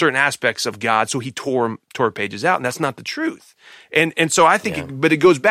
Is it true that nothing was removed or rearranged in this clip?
yes; 0 cuts

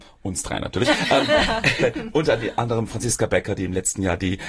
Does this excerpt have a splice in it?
no; 0 cuts

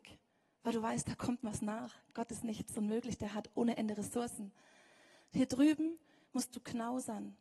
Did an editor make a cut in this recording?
no; 0 cuts

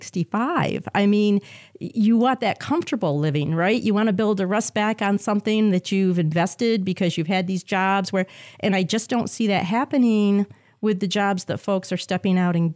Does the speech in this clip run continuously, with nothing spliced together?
yes; 0 cuts

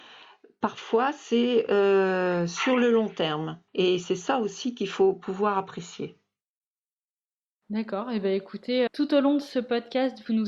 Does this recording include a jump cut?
yes; 2 cuts; at 3.7 s, 8.9 s

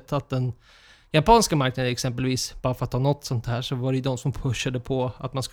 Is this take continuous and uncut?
yes; 0 cuts

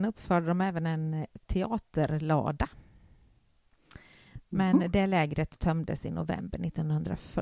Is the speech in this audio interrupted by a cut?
no; 0 cuts

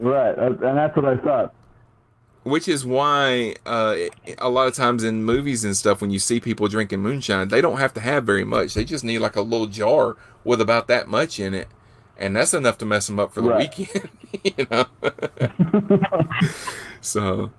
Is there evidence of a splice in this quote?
no; 0 cuts

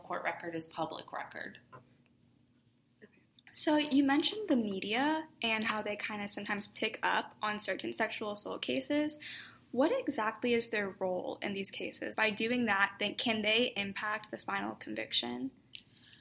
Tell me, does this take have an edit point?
yes; 1 cut; at 12.1 s

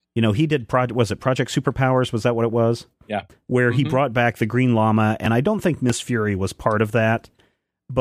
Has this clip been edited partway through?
no; 0 cuts

